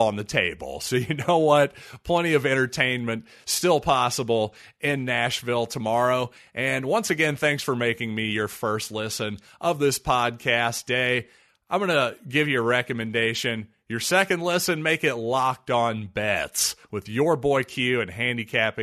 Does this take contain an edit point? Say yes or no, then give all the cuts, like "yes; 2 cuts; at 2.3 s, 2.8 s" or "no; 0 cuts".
no; 0 cuts